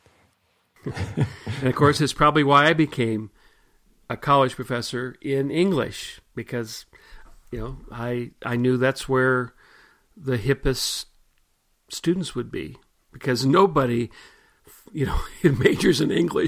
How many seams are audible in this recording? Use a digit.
0